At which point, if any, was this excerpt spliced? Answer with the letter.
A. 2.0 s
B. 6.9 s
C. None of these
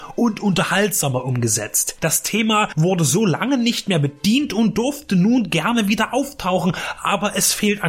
C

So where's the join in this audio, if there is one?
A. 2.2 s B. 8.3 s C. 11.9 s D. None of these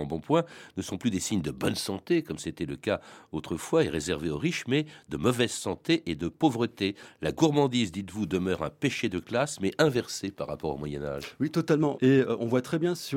C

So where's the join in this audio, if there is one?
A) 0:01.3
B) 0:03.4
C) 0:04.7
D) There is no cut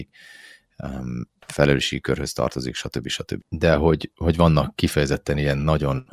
B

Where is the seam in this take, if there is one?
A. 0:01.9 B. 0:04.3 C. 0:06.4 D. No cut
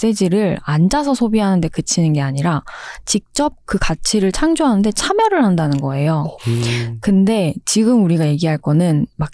C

